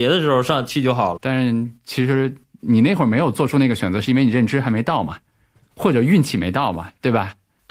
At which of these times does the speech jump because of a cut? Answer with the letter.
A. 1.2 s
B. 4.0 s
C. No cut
A